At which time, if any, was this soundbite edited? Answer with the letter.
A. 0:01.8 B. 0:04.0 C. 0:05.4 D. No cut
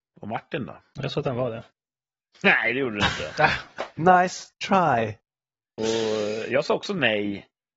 B